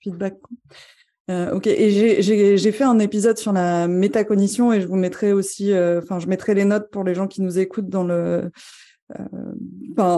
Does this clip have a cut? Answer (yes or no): no